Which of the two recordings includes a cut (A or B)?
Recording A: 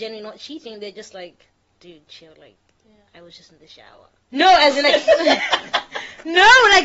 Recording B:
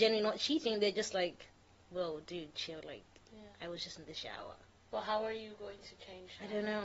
A